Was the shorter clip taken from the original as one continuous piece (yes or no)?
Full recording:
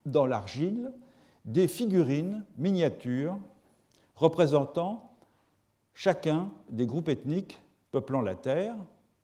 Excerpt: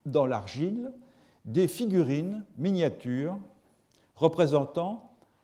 yes